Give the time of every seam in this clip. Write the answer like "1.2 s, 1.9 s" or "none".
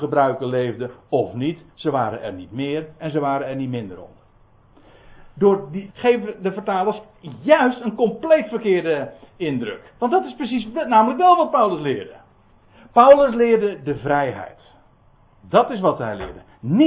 5.9 s